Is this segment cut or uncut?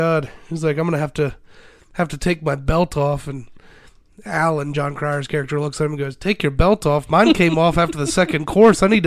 uncut